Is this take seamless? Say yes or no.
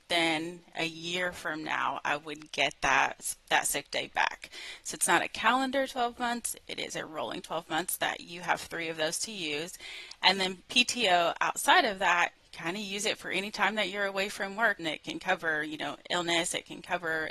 no